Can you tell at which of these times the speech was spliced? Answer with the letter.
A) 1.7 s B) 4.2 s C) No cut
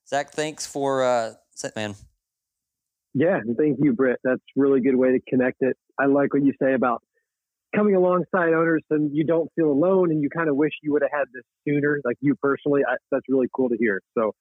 A